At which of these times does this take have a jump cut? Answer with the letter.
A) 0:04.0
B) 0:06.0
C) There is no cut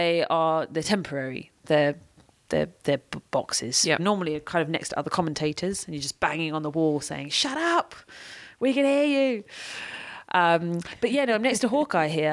A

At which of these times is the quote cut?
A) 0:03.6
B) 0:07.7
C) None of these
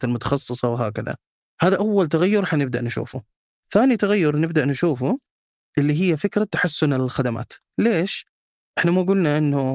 C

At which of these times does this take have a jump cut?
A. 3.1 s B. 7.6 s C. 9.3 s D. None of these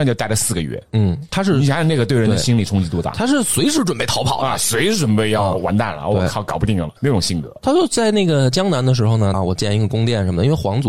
C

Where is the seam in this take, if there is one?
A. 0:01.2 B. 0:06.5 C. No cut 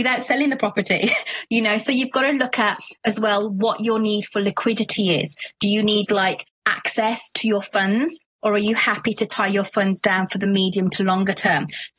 B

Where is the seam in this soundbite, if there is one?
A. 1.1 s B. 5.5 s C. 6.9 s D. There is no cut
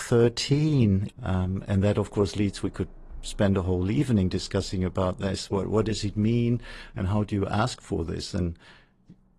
A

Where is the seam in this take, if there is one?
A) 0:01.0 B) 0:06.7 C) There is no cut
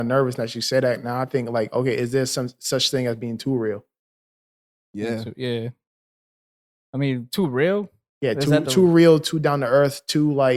C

